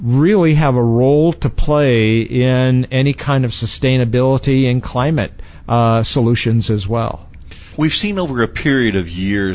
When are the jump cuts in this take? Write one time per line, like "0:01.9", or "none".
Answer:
none